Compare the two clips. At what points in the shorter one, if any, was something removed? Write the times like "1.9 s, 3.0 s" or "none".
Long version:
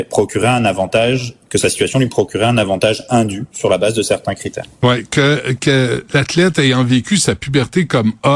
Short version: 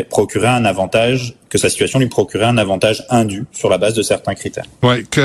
none